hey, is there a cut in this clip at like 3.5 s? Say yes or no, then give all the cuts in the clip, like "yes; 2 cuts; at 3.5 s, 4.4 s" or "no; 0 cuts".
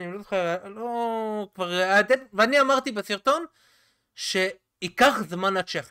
no; 0 cuts